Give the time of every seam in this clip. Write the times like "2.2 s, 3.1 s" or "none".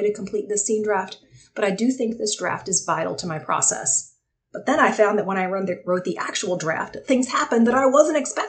4.3 s